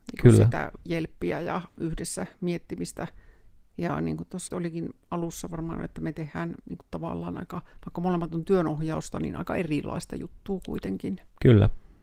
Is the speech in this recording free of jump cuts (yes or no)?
no